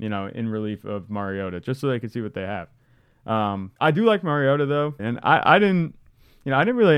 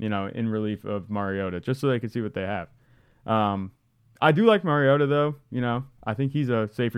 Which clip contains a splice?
first; 2 cuts; at 3.8 s, 5.0 s

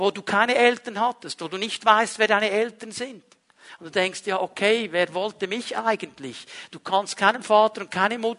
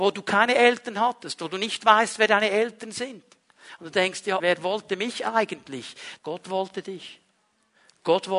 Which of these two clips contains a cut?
second; 2 cuts; at 4.4 s, 6.2 s

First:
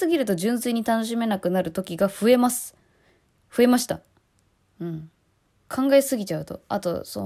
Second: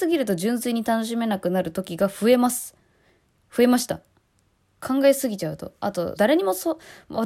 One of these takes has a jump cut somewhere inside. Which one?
second; 2 cuts; at 4.7 s, 6.2 s

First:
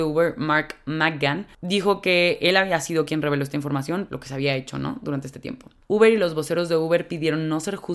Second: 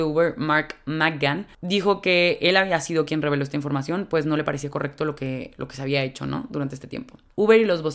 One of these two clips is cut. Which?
first; 1 cut; at 4.1 s

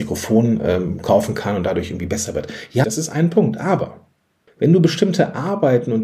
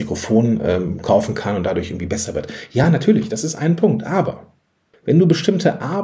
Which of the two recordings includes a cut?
first; 1 cut; at 2.8 s

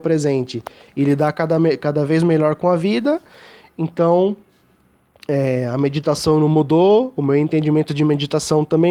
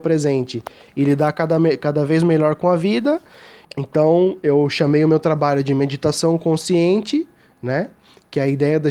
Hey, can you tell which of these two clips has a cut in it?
second; 1 cut; at 3.6 s

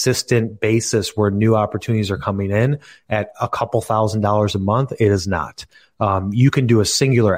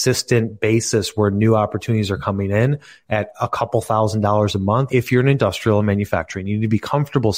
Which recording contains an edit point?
second; 1 cut; at 4.9 s

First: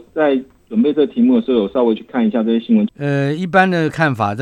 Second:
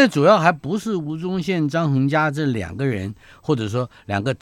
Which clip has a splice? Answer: first; 1 cut; at 2.9 s

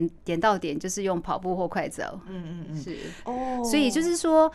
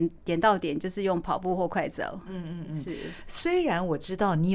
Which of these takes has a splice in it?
first; 1 cut; at 3.2 s

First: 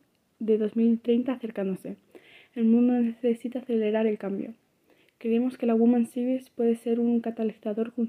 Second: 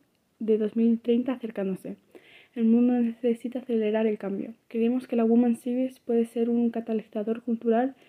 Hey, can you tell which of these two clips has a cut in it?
second; 1 cut; at 4.6 s

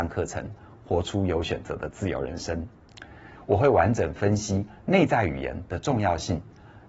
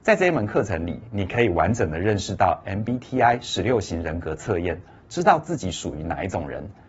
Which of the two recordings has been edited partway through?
first; 1 cut; at 3.4 s

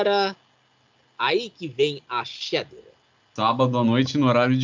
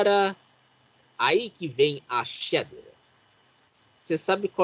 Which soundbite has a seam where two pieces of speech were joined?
first; 1 cut; at 3.4 s

